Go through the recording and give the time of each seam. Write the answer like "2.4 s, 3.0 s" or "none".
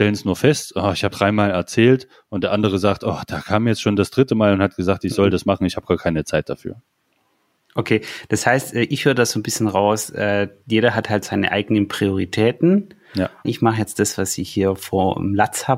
1.1 s, 13.4 s